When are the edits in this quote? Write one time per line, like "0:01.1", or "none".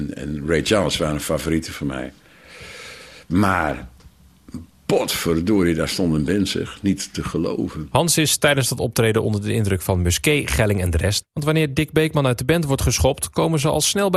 0:11.2